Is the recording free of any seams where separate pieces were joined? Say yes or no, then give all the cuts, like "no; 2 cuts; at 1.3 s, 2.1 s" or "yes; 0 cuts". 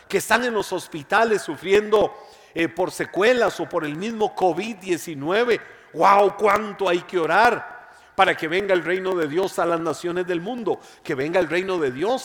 yes; 0 cuts